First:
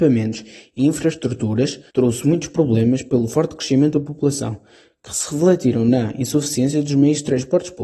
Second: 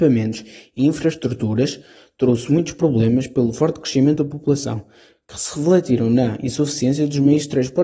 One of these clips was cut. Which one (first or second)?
first